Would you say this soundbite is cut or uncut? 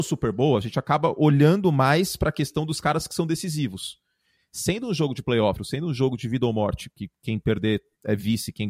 cut